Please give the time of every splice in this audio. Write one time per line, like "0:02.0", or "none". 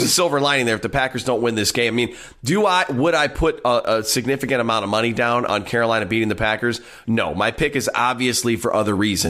none